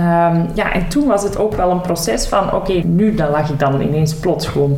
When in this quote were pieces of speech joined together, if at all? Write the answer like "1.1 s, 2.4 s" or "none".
2.8 s

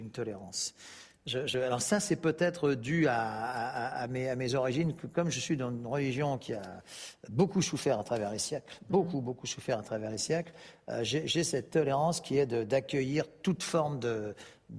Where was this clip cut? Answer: none

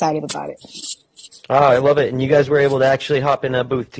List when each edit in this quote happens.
none

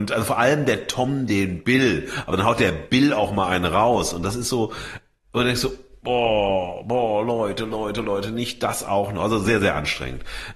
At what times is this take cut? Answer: none

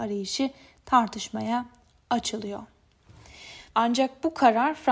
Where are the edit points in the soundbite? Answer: 3.7 s

